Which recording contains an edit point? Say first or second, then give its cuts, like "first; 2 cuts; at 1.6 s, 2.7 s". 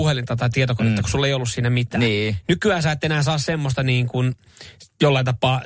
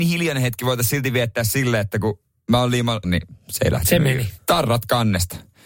second; 2 cuts; at 3.0 s, 4.4 s